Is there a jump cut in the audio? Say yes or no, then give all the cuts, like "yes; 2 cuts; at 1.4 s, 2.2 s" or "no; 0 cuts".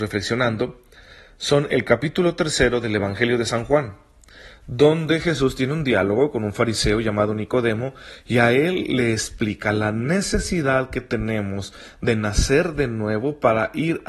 no; 0 cuts